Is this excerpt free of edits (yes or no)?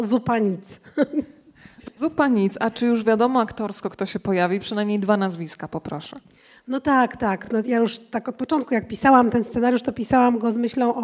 yes